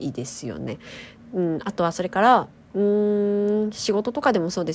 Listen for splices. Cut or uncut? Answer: uncut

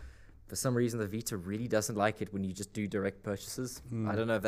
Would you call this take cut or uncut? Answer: uncut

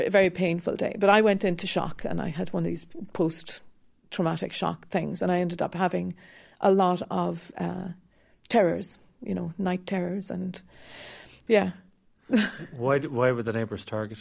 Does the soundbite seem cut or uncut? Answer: uncut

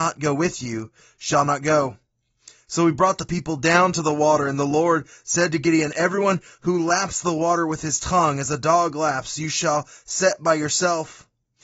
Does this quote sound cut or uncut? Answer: uncut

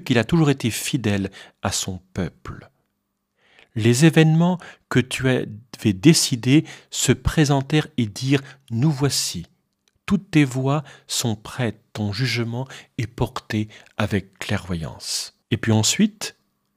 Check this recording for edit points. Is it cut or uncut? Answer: cut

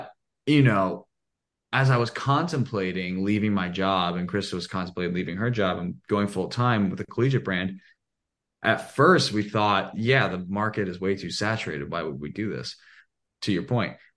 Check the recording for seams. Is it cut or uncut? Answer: uncut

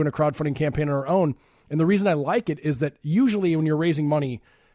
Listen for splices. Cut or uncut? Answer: uncut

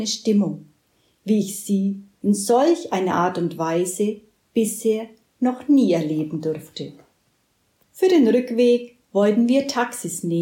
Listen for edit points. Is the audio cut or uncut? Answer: uncut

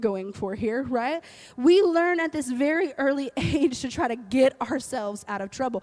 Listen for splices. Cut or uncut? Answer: uncut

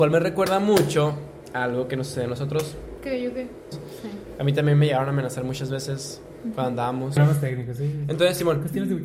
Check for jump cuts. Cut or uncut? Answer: cut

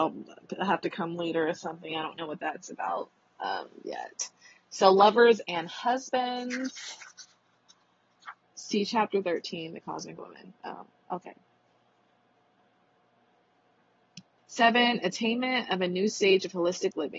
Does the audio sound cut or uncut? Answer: cut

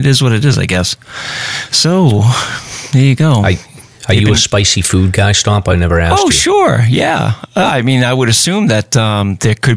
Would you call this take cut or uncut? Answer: uncut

